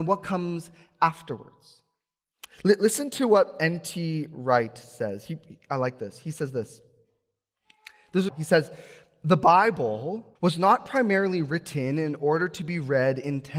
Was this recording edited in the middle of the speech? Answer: yes; 2 cuts; at 8.3 s, 10.4 s

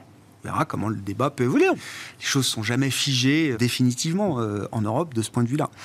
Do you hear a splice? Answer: yes; 2 cuts; at 1.7 s, 3.5 s

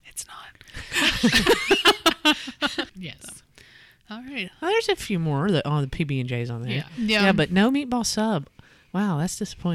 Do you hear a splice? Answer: yes; 1 cut; at 2.9 s

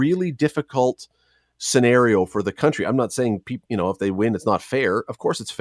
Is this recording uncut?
yes; 0 cuts

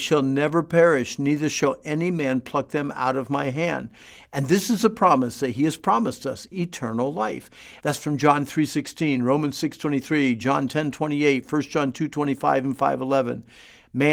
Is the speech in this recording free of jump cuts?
no; 2 cuts; at 6.5 s, 7.8 s

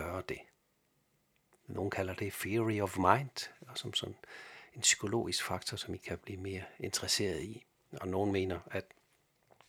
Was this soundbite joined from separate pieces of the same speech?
no; 0 cuts

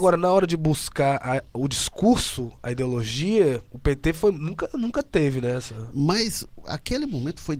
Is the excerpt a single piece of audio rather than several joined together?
yes; 0 cuts

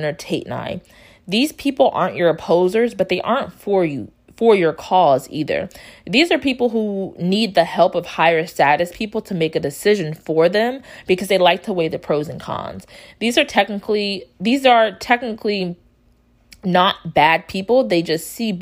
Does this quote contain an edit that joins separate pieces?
no; 0 cuts

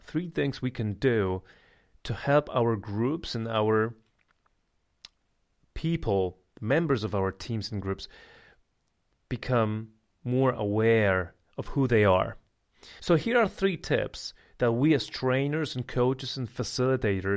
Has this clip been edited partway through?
yes; 2 cuts; at 11.4 s, 13.0 s

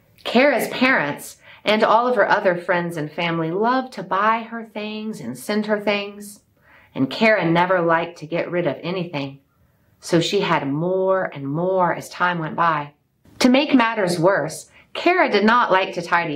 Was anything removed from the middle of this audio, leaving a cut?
no; 0 cuts

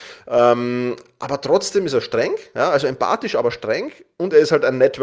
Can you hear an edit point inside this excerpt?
no; 0 cuts

